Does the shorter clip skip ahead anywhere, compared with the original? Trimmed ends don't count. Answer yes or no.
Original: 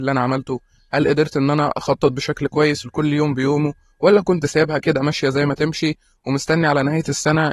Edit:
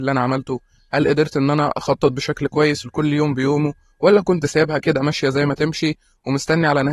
no